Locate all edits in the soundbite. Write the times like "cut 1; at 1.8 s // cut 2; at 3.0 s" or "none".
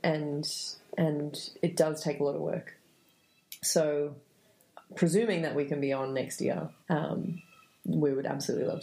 cut 1; at 6.8 s